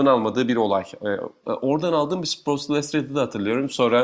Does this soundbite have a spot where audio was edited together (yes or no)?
yes